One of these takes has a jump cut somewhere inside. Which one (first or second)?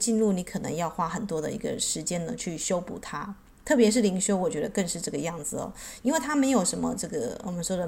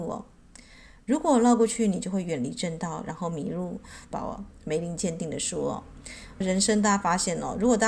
second